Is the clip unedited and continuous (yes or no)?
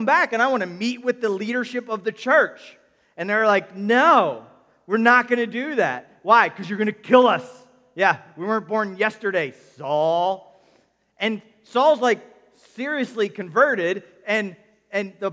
yes